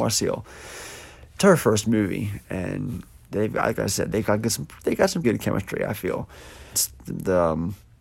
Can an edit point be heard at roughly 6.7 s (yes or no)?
yes